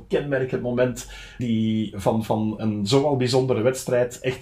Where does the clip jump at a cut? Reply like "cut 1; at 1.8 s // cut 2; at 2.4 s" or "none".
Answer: cut 1; at 1.4 s // cut 2; at 2.6 s